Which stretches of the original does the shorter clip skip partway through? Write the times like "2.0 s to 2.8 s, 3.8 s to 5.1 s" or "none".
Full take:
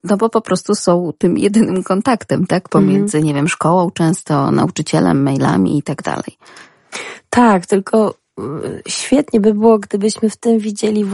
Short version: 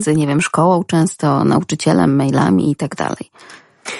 none